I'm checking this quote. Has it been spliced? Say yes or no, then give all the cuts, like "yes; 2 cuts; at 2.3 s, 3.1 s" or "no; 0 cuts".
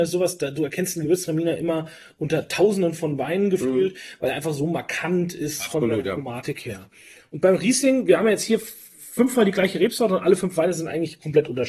no; 0 cuts